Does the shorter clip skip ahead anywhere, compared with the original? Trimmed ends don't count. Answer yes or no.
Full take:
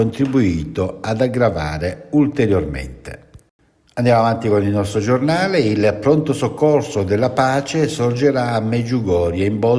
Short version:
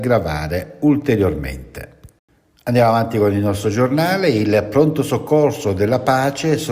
no